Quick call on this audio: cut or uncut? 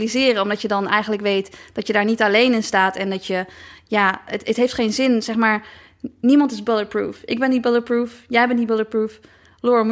uncut